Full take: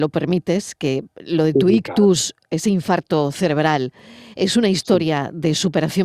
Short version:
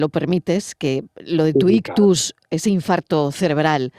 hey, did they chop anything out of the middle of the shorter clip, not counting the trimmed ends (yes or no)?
no